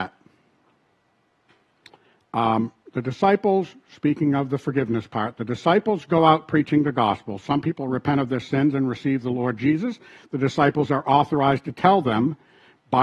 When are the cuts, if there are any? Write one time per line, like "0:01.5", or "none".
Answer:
none